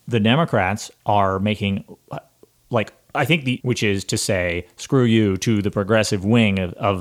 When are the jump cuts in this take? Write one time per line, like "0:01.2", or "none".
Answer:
0:03.6